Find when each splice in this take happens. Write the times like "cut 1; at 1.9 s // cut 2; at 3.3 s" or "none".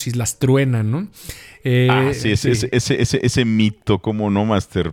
none